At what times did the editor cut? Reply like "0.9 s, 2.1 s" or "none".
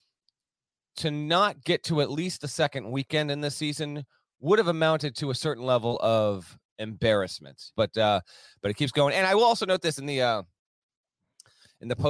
7.7 s